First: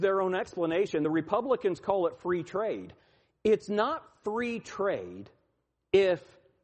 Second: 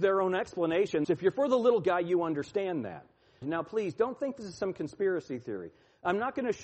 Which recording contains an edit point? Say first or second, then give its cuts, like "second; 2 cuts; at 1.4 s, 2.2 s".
second; 2 cuts; at 1.0 s, 3.4 s